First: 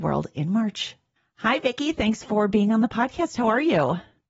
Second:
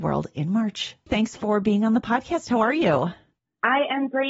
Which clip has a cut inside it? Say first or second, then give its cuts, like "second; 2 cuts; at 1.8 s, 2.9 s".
second; 1 cut; at 1.1 s